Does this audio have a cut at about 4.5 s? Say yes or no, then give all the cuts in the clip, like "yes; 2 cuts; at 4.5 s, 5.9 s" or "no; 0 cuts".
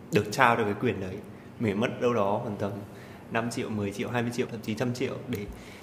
yes; 1 cut; at 4.5 s